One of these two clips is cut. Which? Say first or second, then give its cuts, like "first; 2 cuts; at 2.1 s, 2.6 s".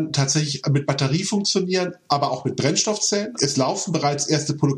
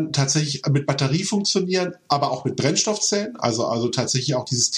first; 1 cut; at 3.4 s